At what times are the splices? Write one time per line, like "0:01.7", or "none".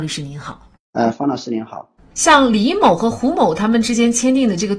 0:02.1